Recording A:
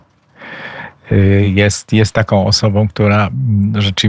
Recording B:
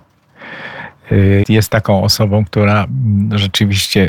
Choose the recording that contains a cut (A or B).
B